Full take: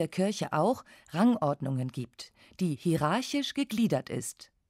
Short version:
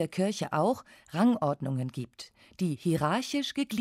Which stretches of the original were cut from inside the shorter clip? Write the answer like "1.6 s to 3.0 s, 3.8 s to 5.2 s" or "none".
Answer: none